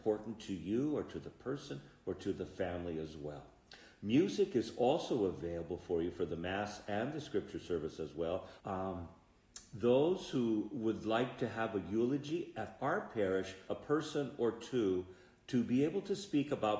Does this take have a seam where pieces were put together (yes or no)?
yes